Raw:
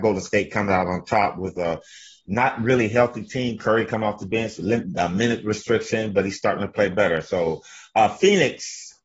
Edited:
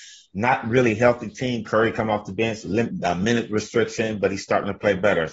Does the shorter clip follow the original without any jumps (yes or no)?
yes